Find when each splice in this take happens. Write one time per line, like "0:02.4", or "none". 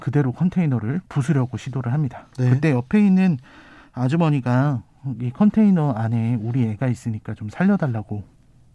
none